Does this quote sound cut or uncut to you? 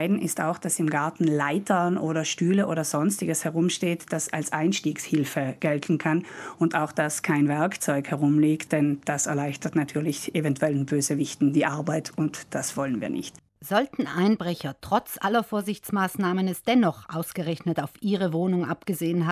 uncut